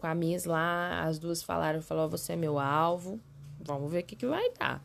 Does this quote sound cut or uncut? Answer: cut